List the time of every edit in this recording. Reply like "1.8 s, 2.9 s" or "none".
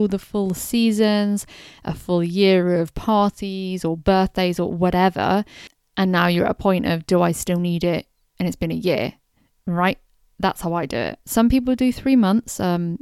none